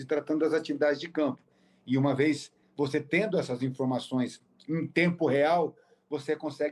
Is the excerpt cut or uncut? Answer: uncut